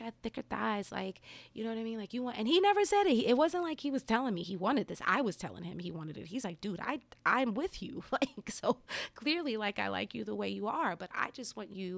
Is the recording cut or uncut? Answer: uncut